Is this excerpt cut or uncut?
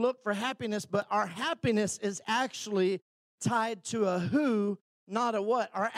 uncut